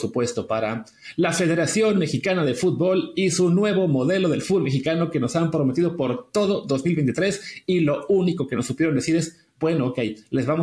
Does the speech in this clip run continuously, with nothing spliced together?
yes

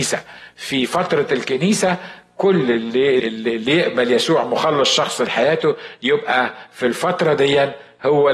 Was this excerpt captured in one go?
no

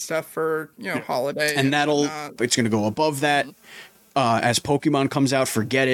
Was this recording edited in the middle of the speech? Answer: yes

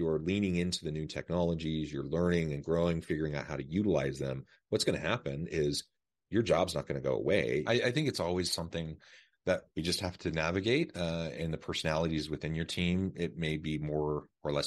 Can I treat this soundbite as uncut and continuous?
no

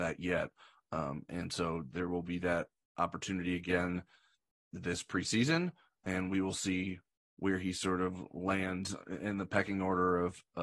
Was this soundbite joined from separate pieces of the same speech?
no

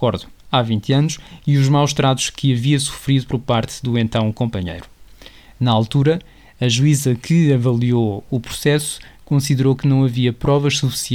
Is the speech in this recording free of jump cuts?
yes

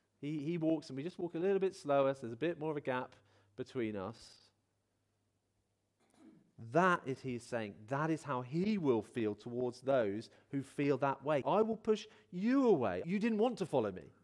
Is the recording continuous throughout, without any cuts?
no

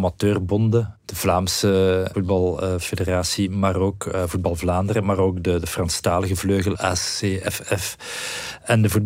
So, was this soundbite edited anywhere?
no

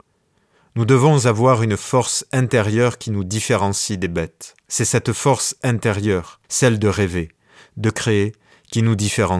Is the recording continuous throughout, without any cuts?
no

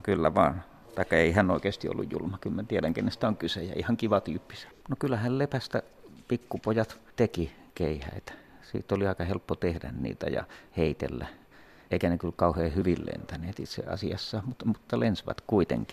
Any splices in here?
yes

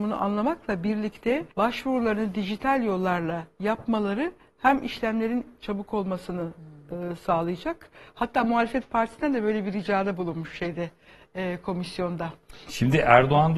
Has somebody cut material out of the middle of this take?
yes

